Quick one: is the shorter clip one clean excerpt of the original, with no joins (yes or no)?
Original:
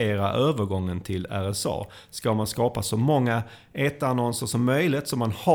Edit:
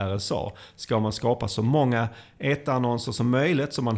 yes